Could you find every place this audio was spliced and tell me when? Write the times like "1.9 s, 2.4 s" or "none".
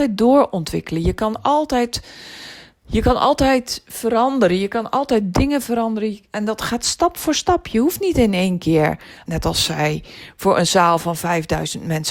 9.3 s